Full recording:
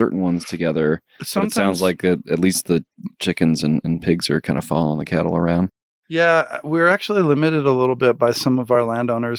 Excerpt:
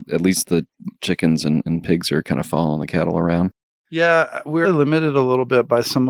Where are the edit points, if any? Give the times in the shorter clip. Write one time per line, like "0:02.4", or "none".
0:04.6